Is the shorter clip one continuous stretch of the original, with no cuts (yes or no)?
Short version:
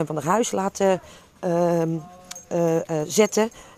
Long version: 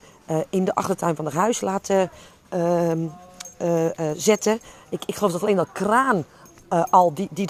yes